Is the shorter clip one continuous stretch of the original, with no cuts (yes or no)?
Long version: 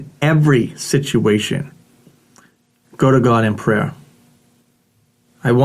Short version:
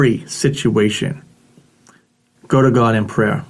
yes